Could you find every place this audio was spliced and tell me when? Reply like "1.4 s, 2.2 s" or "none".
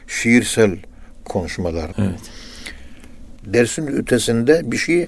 1.9 s, 3.4 s